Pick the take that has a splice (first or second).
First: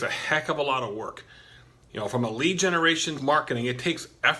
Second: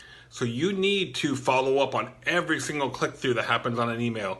first